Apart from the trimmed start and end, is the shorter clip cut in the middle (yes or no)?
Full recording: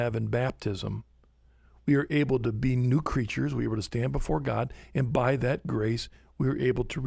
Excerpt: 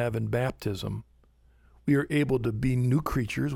no